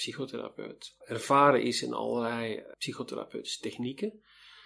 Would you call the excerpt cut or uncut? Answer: cut